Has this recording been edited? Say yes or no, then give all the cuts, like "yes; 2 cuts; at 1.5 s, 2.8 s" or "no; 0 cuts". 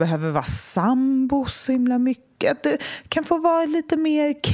no; 0 cuts